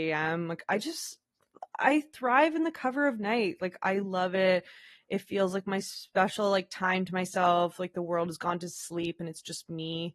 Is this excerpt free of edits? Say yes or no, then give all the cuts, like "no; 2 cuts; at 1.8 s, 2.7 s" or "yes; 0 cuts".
yes; 0 cuts